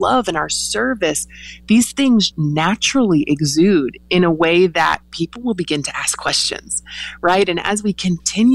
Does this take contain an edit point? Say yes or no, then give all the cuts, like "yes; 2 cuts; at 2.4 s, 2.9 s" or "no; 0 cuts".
yes; 1 cut; at 2.3 s